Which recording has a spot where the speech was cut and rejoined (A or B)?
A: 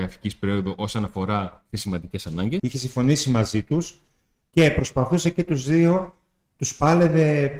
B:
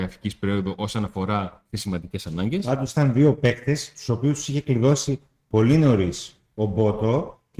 A